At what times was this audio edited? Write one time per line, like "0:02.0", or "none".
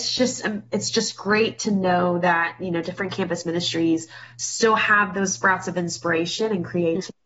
none